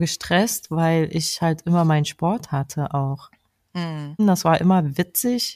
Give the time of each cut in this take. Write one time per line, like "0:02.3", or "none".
0:04.2